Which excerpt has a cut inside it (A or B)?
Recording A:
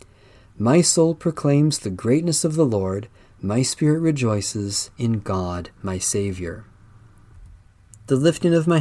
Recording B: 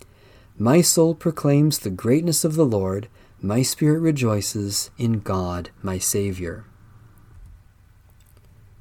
A